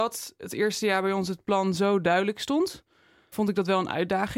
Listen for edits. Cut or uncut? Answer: cut